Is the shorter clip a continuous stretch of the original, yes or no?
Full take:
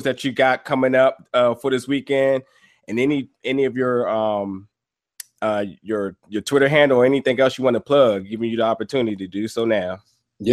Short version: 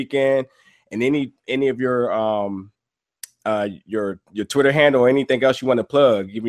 yes